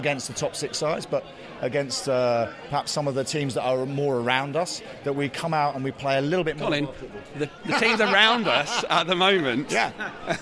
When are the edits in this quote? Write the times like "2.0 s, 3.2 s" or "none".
7.6 s